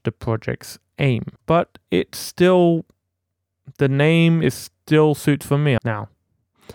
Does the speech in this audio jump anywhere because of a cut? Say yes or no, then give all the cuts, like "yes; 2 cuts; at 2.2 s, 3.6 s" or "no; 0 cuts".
yes; 2 cuts; at 1.4 s, 5.8 s